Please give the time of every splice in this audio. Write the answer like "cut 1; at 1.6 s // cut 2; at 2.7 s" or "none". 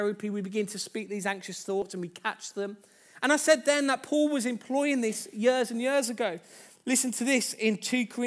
none

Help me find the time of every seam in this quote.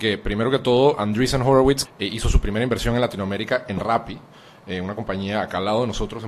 cut 1; at 1.9 s

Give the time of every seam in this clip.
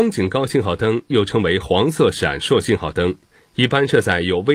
cut 1; at 3.4 s

